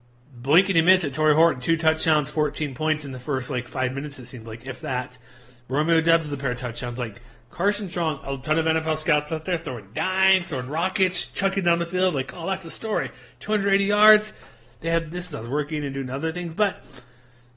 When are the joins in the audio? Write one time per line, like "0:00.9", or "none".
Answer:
0:15.3